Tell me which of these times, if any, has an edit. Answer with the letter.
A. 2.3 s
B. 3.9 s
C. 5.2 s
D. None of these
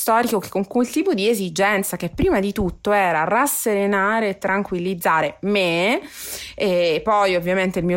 D